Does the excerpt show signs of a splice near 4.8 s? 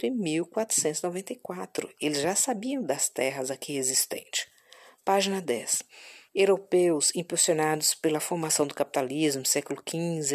no; 1 cut; at 6.3 s

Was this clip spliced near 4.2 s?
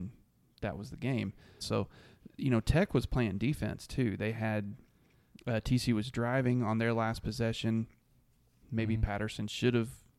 no; 2 cuts; at 1.6 s, 8.6 s

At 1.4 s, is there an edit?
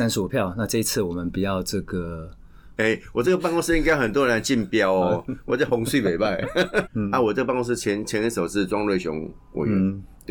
no; 2 cuts; at 2.8 s, 6.9 s

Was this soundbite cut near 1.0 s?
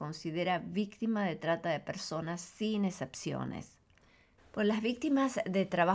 no; 1 cut; at 4.4 s

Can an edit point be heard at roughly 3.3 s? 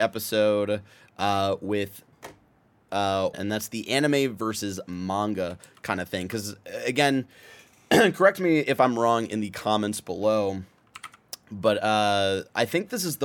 yes; 1 cut; at 3.3 s

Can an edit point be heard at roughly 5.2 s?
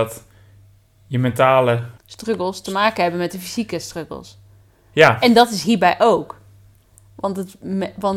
no; 0 cuts

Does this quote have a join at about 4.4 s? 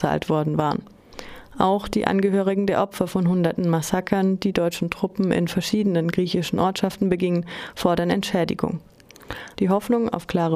no; 1 cut; at 9.5 s

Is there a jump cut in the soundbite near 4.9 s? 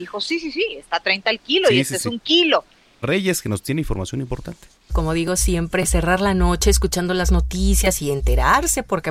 yes; 2 cuts; at 3.0 s, 4.9 s

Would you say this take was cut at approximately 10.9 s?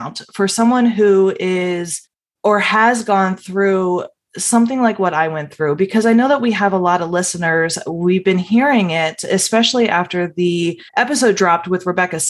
yes; 1 cut; at 10.9 s

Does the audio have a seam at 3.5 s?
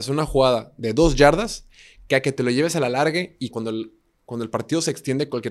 yes; 1 cut; at 3.5 s

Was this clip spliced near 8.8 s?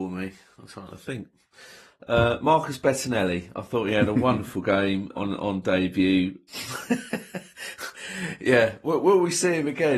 no; 2 cuts; at 5.1 s, 6.5 s

